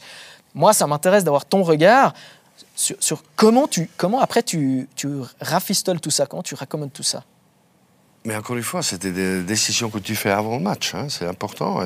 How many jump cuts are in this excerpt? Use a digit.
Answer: 0